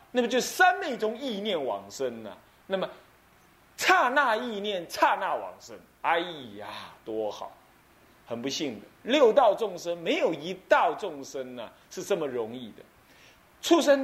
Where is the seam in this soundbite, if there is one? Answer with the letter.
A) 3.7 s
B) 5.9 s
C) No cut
C